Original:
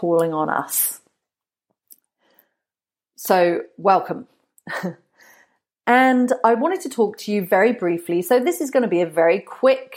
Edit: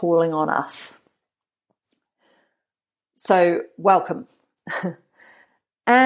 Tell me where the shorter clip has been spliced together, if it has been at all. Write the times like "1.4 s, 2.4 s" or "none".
none